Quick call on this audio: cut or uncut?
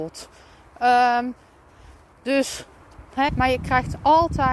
cut